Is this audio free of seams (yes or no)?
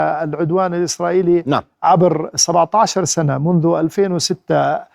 yes